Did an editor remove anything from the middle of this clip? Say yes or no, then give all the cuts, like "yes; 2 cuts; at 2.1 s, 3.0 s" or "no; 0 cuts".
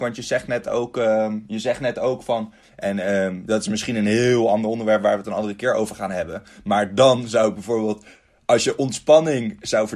yes; 1 cut; at 2.6 s